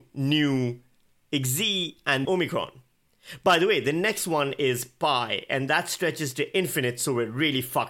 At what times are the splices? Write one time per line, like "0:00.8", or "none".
0:02.3